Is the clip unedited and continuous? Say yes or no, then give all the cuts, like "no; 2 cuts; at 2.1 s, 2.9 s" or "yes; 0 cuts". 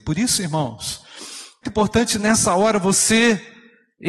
no; 1 cut; at 1.6 s